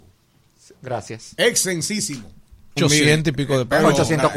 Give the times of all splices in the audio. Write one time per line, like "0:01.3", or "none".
0:02.8